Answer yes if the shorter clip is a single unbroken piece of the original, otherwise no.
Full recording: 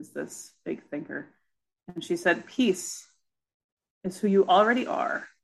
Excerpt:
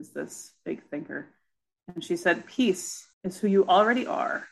no